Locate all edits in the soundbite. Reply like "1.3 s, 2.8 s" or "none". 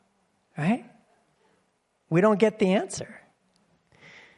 none